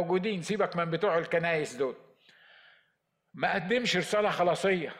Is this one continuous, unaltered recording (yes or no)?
yes